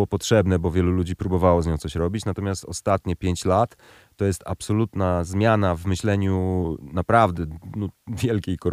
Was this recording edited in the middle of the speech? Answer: no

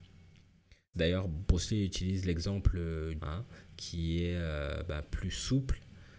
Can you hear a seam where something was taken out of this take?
yes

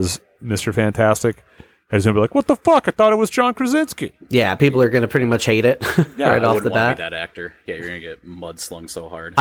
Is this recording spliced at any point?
no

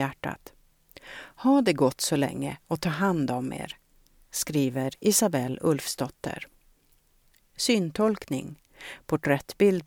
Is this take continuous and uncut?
yes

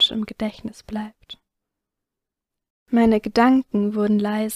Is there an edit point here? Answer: yes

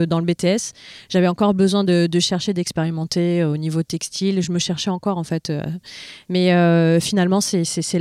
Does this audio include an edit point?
no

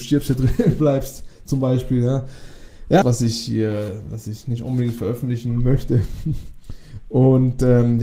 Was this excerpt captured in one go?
no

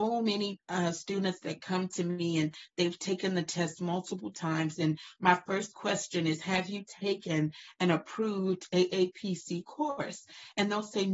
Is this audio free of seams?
yes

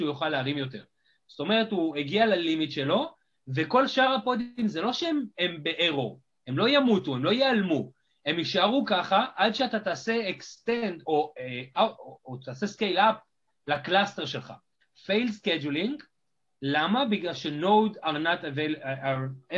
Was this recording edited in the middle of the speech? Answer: yes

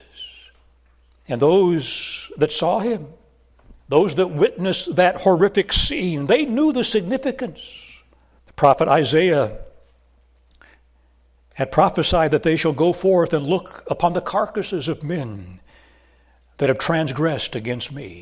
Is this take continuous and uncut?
no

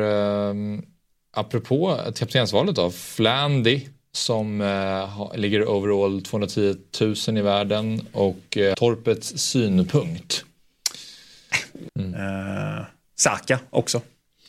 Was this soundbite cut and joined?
yes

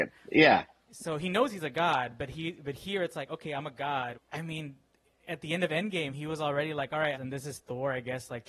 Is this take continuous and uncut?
no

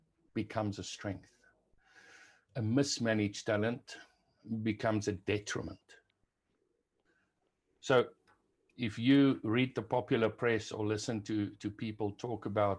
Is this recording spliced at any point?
no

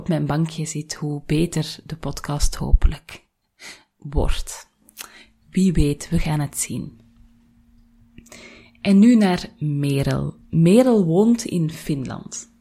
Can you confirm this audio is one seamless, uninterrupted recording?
yes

